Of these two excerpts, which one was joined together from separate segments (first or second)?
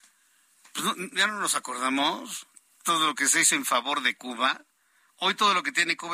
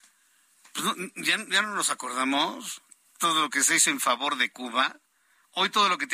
first